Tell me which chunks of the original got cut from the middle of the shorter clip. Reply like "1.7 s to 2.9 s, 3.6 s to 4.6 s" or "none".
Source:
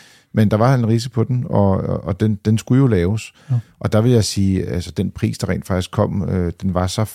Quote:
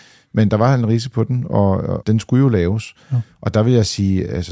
2.0 s to 2.4 s